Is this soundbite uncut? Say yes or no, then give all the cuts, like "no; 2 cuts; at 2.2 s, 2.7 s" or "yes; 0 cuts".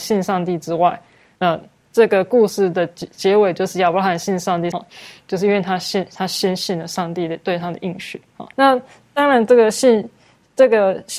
no; 3 cuts; at 1.4 s, 4.7 s, 8.5 s